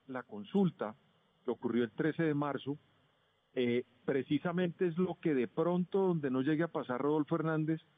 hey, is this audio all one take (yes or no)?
yes